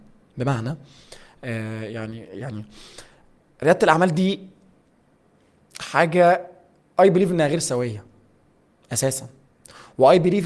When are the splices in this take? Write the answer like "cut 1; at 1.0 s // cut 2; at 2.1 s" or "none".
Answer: none

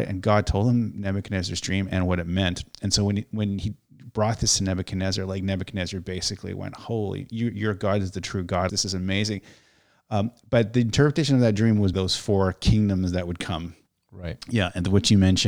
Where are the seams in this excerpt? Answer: cut 1; at 8.7 s // cut 2; at 11.9 s

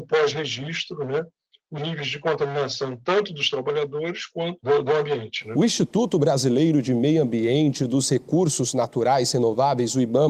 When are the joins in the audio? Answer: cut 1; at 1.8 s

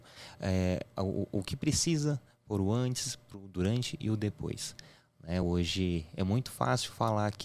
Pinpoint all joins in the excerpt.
none

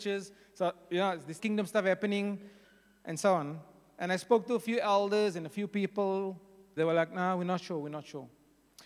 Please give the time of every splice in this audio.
cut 1; at 1.4 s // cut 2; at 6.8 s

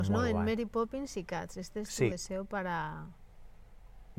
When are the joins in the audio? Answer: none

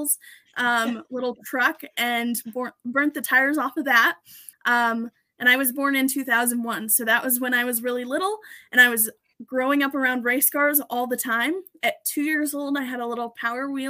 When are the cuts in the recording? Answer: cut 1; at 4.5 s

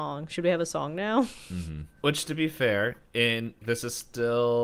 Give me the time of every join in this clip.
cut 1; at 1.9 s // cut 2; at 3.6 s

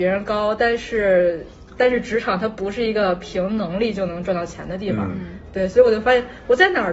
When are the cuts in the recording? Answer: none

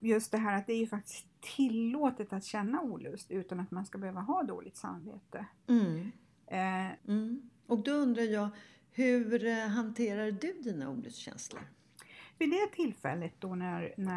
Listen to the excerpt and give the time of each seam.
cut 1; at 7.0 s // cut 2; at 12.4 s

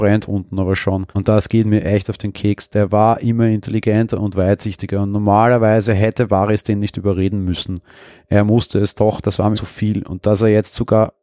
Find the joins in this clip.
cut 1; at 1.1 s // cut 2; at 9.5 s

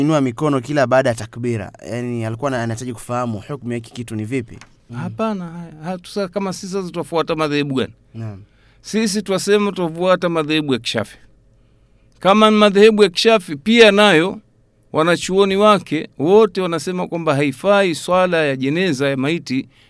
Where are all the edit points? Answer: cut 1; at 4.9 s

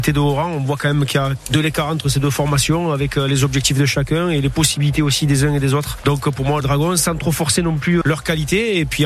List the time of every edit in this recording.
cut 1; at 6.6 s // cut 2; at 8.0 s

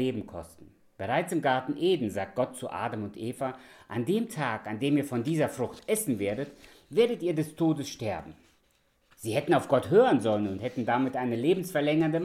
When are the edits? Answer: none

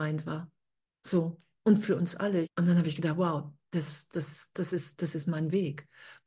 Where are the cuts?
cut 1; at 2.4 s // cut 2; at 4.1 s

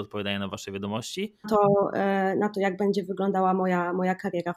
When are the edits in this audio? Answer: cut 1; at 1.4 s

